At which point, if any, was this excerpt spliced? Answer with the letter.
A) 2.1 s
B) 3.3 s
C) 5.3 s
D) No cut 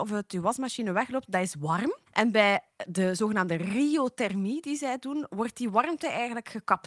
A